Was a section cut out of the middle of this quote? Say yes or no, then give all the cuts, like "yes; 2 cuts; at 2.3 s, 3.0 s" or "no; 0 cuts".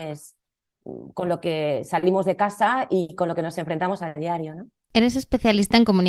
no; 0 cuts